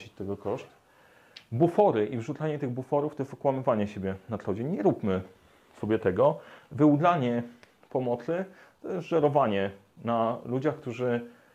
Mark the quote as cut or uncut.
uncut